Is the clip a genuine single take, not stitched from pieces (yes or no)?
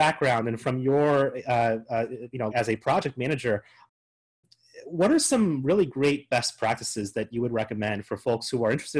no